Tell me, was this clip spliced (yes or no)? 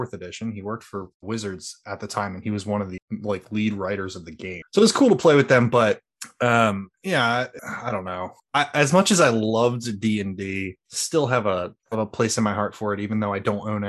yes